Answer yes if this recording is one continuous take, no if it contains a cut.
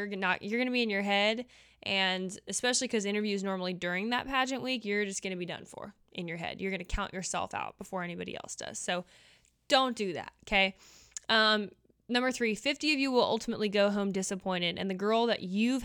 yes